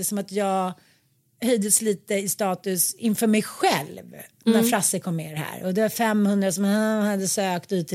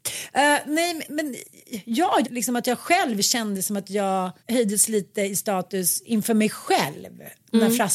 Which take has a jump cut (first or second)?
second